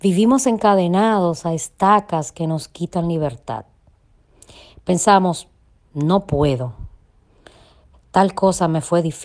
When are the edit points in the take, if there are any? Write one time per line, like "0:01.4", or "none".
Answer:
none